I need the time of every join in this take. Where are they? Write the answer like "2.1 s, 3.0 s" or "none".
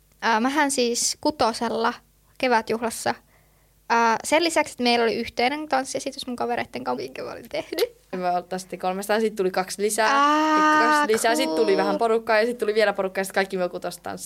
7.0 s, 8.1 s